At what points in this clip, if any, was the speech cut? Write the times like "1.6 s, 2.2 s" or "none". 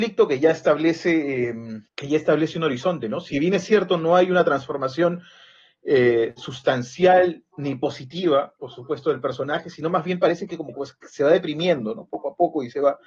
1.9 s

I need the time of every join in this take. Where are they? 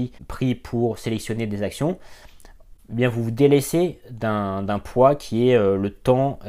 2.8 s

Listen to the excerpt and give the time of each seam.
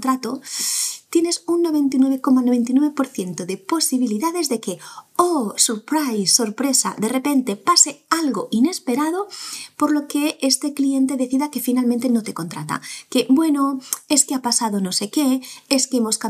none

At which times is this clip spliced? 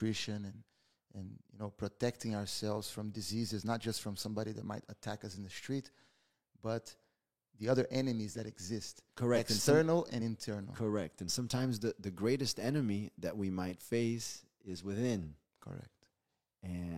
none

